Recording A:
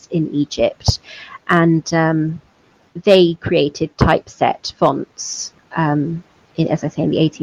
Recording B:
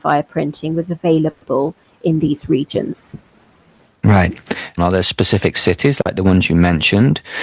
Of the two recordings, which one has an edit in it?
B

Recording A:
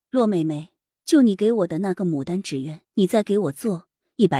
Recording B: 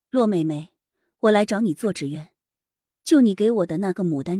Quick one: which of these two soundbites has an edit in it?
A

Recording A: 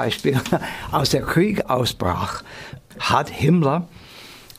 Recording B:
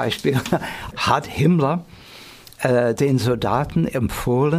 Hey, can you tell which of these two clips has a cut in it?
B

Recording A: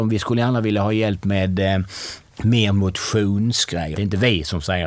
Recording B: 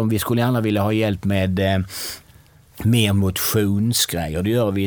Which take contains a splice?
A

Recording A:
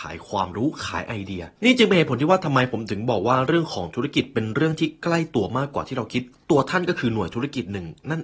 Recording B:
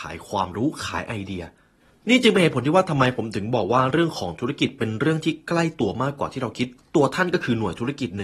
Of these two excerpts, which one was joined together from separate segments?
A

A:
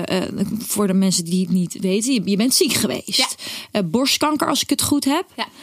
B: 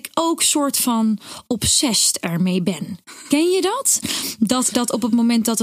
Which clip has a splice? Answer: B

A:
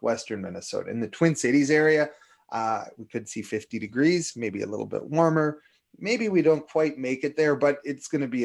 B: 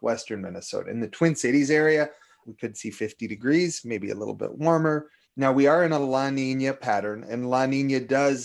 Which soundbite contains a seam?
B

